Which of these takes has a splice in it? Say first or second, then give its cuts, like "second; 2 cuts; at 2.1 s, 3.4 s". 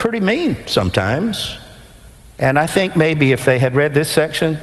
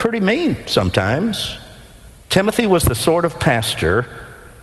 second; 1 cut; at 2.2 s